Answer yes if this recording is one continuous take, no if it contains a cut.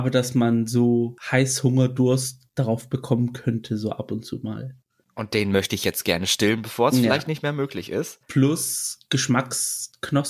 yes